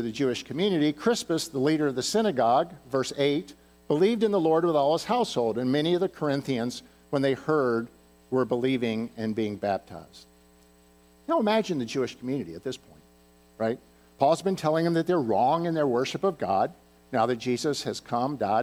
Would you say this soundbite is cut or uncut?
uncut